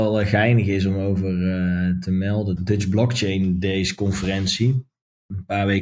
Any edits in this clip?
yes; 1 cut; at 2.6 s

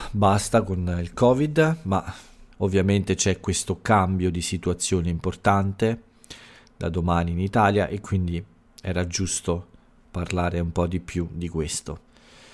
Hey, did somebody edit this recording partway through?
yes; 1 cut; at 2.5 s

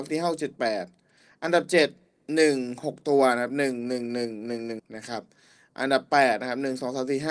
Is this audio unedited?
no; 1 cut; at 4.8 s

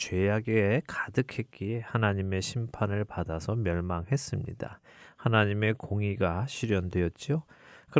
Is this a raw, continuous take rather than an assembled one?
yes; 0 cuts

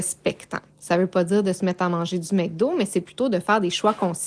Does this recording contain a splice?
no; 0 cuts

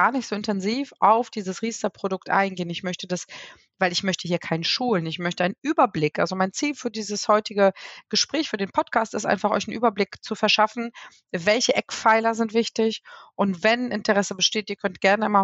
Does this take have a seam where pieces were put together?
no; 0 cuts

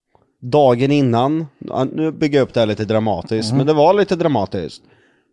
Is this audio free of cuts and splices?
yes; 0 cuts

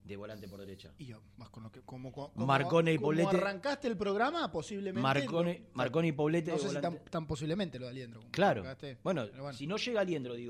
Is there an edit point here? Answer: no; 0 cuts

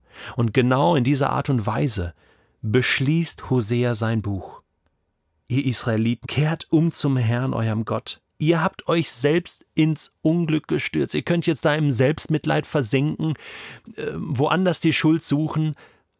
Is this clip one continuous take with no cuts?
no; 2 cuts; at 6.2 s, 8.3 s

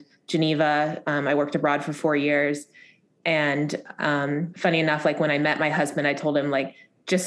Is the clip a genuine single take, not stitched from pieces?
yes; 0 cuts

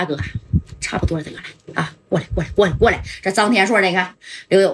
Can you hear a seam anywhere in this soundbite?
no; 0 cuts

